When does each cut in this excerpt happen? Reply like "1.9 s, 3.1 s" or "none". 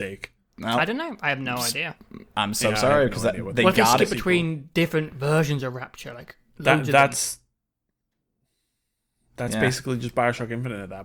none